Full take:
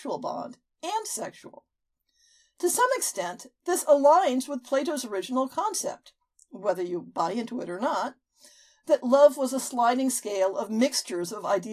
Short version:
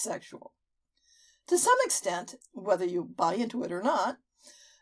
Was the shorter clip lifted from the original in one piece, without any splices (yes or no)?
no